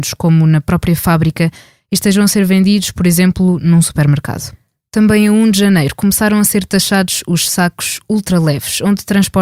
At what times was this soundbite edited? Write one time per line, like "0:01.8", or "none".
none